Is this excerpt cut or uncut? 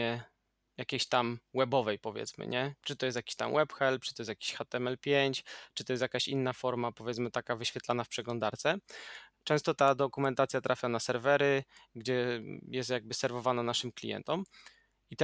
uncut